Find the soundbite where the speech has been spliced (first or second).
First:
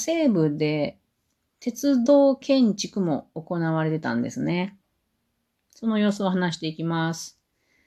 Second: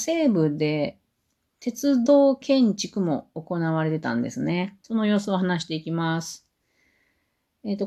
second